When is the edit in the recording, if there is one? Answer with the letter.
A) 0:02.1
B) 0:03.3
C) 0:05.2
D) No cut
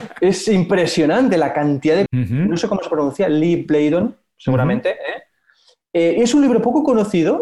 A